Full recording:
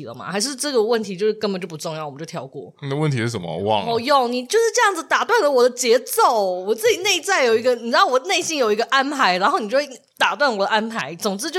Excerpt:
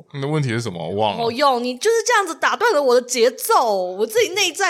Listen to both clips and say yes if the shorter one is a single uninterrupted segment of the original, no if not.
yes